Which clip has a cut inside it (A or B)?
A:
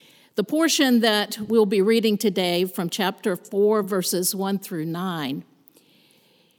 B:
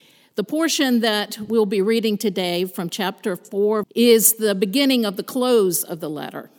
B